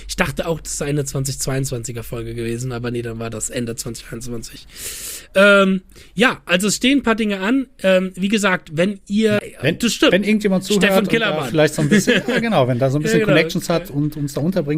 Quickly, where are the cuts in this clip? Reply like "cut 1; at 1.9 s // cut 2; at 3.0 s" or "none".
cut 1; at 9.4 s